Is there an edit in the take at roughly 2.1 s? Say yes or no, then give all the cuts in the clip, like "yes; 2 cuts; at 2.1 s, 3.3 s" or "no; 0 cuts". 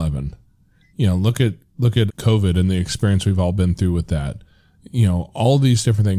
yes; 1 cut; at 2.1 s